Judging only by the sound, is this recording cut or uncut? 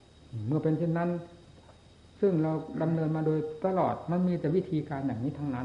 uncut